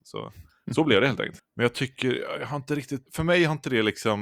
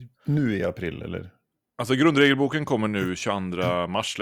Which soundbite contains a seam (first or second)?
first